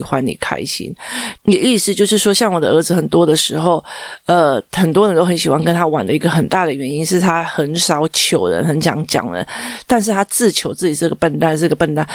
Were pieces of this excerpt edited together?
yes; 1 cut; at 1.4 s

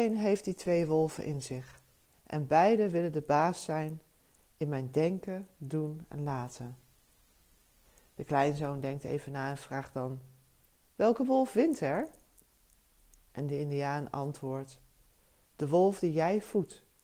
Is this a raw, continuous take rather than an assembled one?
yes; 0 cuts

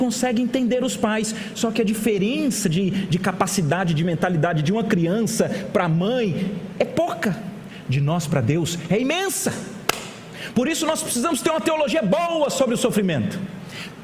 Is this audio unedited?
yes; 0 cuts

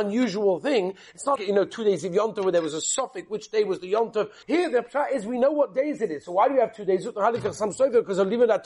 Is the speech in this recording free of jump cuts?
no; 2 cuts; at 1.4 s, 4.4 s

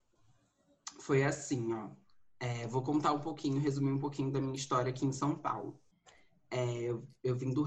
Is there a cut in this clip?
no; 0 cuts

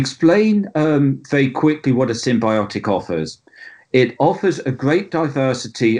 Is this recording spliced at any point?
no; 0 cuts

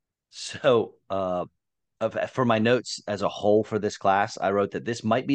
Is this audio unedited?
yes; 0 cuts

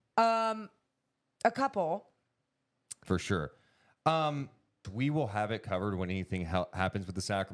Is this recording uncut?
no; 2 cuts; at 3.0 s, 4.8 s

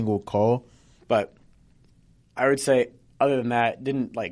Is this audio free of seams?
no; 1 cut; at 1.0 s

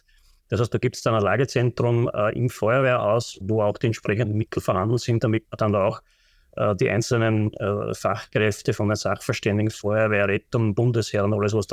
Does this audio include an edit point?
yes; 1 cut; at 3.4 s

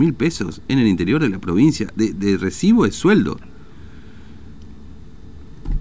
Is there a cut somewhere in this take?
no; 0 cuts

